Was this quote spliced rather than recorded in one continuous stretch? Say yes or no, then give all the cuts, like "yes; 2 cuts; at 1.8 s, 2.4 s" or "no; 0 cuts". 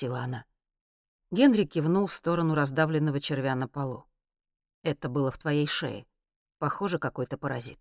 no; 0 cuts